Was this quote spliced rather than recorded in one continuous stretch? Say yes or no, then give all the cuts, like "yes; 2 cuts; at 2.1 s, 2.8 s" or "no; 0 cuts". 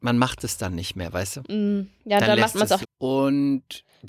yes; 1 cut; at 2.8 s